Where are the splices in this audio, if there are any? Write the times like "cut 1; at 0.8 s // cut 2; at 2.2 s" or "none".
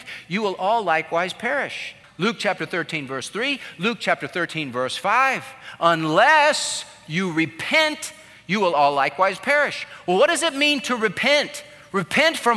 cut 1; at 2.0 s

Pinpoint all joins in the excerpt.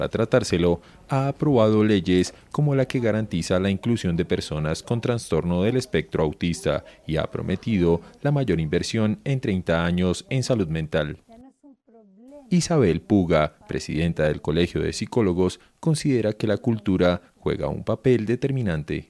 none

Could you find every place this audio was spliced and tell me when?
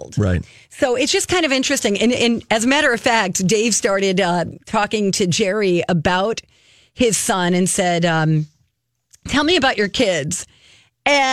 none

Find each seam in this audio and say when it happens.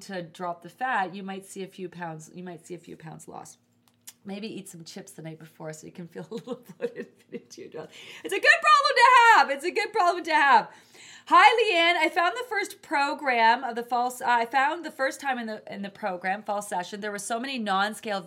none

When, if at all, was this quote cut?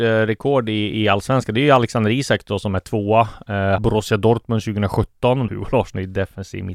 cut 1; at 3.8 s // cut 2; at 5.5 s

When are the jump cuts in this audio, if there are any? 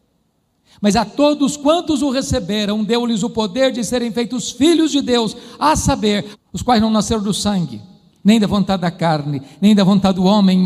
cut 1; at 6.3 s

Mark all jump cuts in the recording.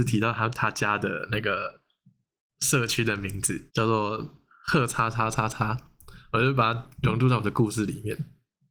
cut 1; at 3.7 s

